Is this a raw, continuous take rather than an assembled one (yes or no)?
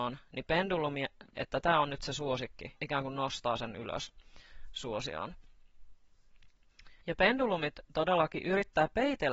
no